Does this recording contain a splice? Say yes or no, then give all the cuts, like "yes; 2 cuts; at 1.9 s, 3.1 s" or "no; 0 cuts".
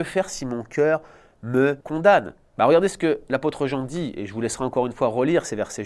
yes; 1 cut; at 1.8 s